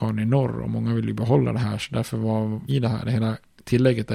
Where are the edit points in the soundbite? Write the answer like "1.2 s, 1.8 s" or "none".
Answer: 2.7 s